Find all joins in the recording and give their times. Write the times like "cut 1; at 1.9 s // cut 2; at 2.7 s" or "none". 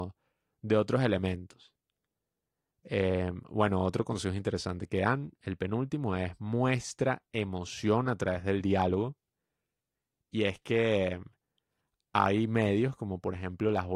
none